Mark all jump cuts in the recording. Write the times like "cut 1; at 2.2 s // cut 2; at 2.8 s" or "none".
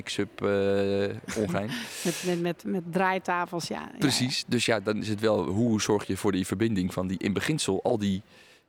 none